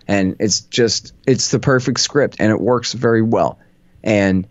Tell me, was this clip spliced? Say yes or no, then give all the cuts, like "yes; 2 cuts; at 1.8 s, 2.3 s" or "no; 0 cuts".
yes; 1 cut; at 1.2 s